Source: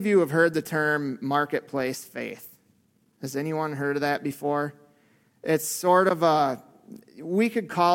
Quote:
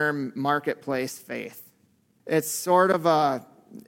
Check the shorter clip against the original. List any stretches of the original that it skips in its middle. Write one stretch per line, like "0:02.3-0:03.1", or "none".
0:03.1-0:05.4